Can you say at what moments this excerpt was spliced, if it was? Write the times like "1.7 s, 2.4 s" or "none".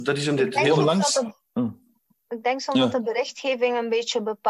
none